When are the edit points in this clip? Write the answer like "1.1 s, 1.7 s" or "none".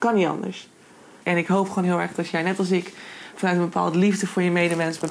1.2 s